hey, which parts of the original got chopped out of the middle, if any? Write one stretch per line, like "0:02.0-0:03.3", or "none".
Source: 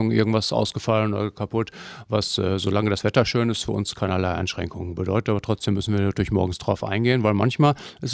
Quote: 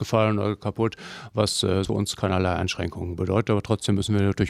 0:02.6-0:03.6